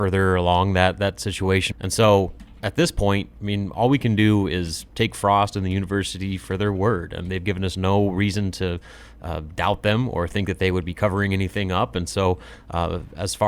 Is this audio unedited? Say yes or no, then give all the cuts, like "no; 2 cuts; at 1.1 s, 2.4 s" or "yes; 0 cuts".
no; 1 cut; at 1.7 s